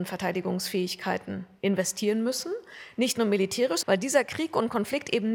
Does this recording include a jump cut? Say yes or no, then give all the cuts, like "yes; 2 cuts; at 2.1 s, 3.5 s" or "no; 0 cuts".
yes; 1 cut; at 3.8 s